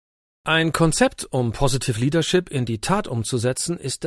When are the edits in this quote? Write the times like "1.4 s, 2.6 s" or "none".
none

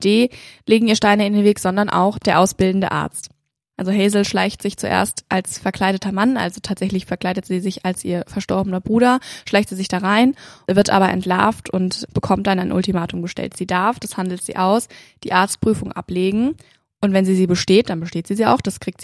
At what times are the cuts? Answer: none

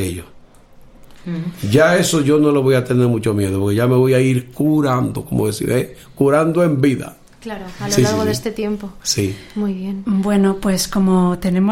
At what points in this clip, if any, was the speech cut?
none

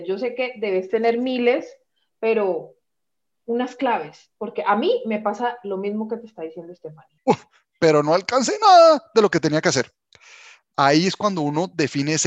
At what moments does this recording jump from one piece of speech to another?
7.2 s

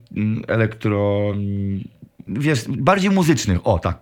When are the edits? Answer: 2.3 s

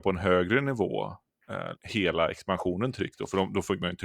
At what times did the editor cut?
1.7 s

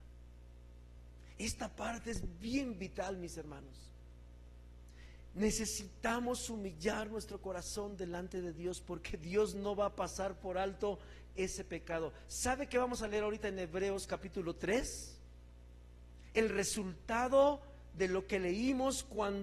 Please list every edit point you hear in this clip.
1.3 s

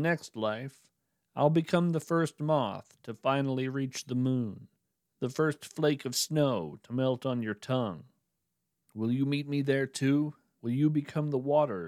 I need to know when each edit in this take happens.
10.5 s

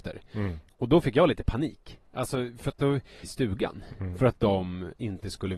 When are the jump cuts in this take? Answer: 3.2 s

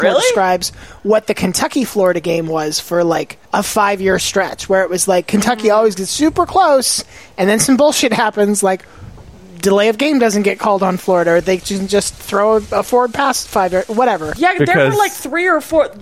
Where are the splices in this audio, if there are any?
3.4 s, 14.4 s

